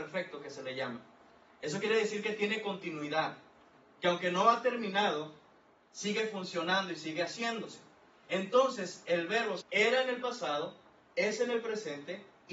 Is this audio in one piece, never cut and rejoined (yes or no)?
no